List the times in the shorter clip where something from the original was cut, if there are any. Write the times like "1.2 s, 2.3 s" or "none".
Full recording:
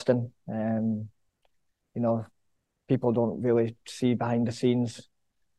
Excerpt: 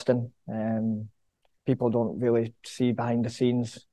1.6 s